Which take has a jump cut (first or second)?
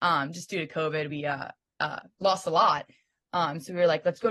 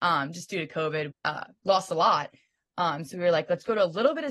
second